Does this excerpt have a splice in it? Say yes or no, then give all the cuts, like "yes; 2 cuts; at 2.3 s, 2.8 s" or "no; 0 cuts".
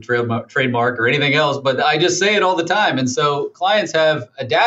no; 0 cuts